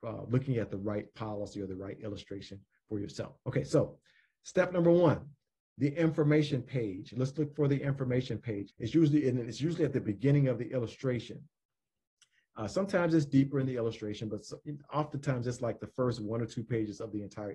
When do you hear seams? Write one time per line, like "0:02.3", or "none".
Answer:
0:08.7